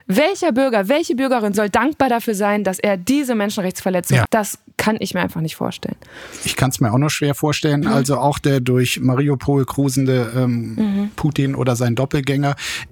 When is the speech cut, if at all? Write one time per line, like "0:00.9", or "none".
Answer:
0:04.3
0:07.8